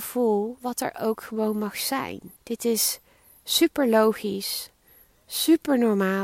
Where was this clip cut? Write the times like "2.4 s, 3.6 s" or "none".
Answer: 2.4 s